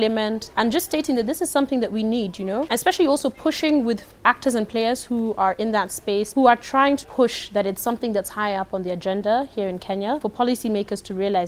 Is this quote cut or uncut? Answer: cut